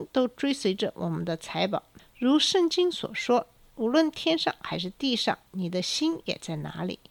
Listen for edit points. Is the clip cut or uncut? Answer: cut